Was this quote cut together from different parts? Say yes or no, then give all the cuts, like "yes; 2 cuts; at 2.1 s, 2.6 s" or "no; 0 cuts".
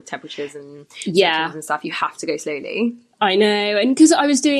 no; 0 cuts